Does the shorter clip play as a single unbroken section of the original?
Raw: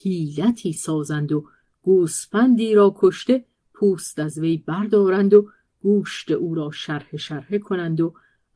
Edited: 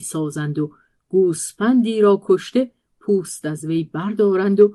yes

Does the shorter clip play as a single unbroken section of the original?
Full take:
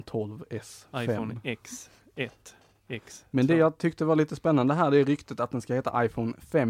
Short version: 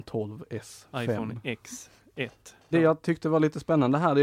no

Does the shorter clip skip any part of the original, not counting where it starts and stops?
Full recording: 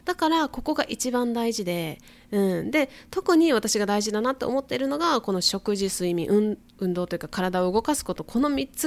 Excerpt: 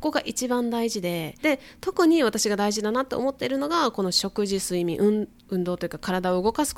yes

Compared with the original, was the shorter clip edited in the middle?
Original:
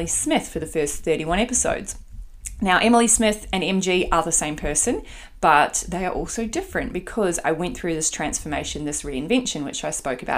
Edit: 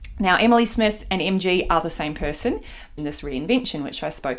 yes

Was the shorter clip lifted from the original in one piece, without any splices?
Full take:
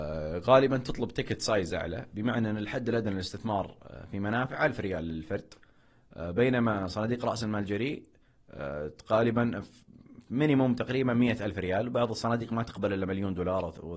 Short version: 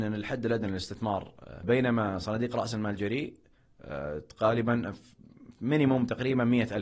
no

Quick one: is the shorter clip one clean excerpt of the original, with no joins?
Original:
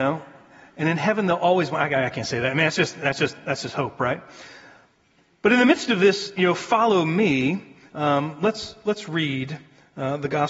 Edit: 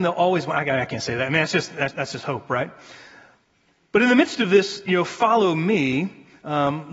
no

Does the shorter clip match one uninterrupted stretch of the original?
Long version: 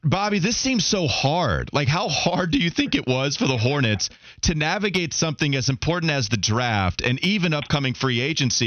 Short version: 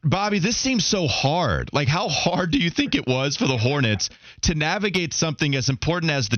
yes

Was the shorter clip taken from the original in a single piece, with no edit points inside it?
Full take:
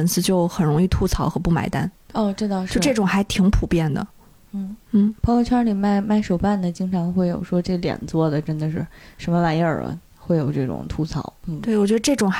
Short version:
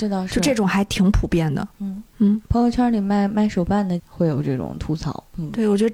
no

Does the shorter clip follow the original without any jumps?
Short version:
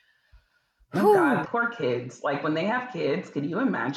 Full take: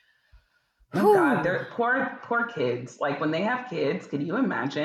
no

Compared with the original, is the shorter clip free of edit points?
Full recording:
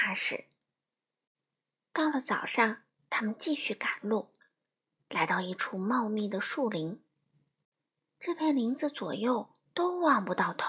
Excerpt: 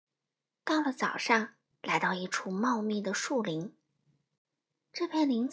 no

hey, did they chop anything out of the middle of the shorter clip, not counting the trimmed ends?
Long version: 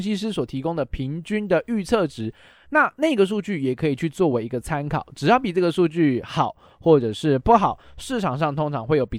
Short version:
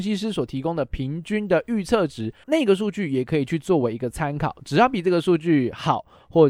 yes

